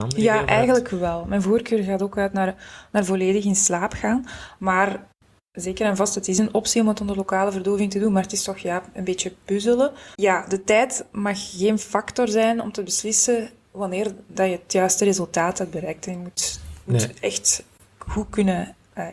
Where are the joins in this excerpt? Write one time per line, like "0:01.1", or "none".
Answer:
0:10.2